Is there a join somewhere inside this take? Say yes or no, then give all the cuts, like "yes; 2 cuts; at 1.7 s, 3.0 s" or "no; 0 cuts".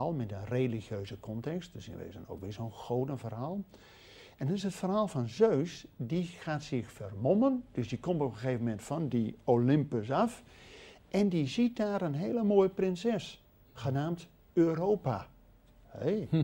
no; 0 cuts